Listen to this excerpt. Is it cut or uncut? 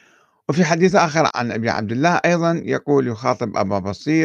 cut